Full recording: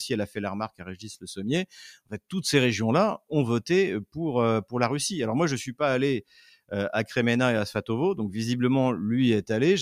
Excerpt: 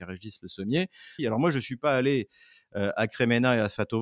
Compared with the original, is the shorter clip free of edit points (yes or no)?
no